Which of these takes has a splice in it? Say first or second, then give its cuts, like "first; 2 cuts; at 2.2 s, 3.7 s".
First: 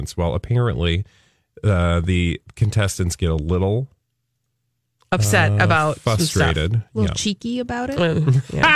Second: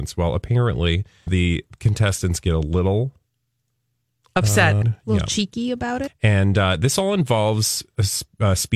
second; 3 cuts; at 1.3 s, 4.8 s, 6.1 s